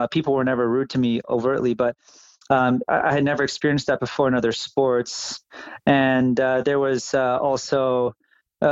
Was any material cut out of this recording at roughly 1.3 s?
yes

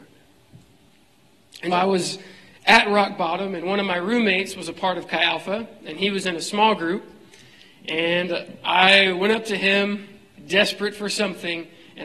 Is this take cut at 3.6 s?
no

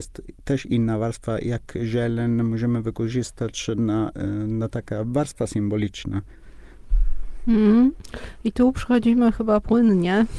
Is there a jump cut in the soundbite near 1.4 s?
no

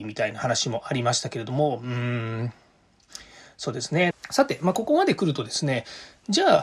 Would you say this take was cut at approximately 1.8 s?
no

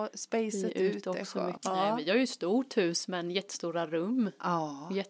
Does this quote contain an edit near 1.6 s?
yes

